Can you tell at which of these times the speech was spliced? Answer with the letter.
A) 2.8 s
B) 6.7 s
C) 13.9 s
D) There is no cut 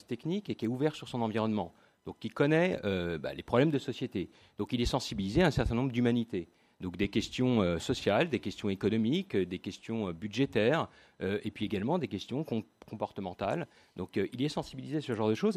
D